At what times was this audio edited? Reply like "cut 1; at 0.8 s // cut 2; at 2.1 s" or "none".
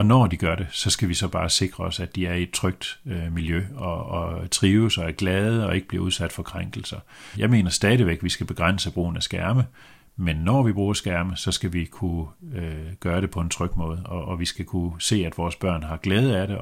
cut 1; at 7.3 s